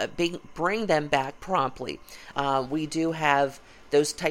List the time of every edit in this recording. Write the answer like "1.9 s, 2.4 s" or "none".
2.3 s